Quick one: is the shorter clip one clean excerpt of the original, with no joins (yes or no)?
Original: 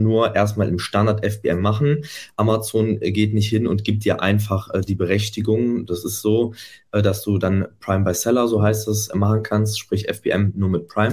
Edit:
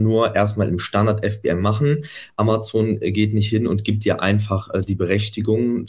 yes